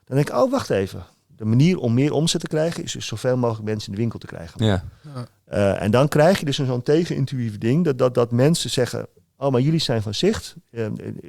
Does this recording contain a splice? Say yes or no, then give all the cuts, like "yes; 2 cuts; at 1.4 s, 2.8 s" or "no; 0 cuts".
yes; 1 cut; at 4.6 s